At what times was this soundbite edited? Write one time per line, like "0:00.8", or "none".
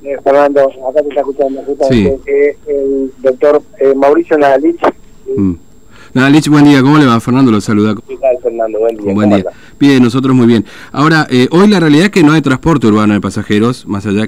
0:08.0